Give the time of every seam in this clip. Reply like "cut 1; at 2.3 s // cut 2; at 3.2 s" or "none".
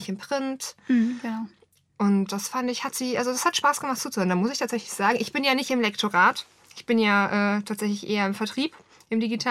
none